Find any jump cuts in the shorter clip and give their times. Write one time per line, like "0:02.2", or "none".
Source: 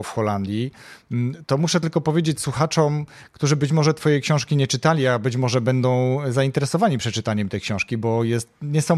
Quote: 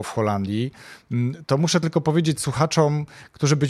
none